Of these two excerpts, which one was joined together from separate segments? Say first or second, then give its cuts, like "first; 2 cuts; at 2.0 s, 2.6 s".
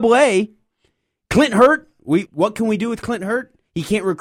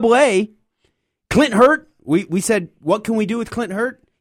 first; 1 cut; at 2.3 s